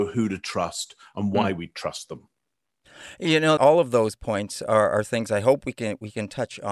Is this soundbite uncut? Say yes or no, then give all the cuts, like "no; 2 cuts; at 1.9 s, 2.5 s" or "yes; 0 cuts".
no; 1 cut; at 3.6 s